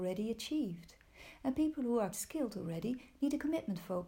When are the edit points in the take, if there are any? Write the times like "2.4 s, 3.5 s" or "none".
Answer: 2.1 s